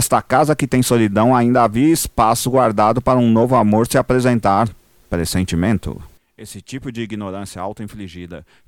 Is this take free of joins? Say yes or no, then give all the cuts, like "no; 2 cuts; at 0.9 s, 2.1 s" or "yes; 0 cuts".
yes; 0 cuts